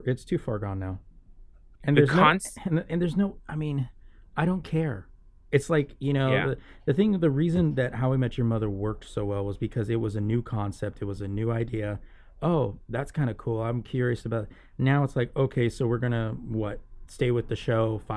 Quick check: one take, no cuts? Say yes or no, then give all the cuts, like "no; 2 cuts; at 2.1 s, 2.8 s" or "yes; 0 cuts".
no; 1 cut; at 1.8 s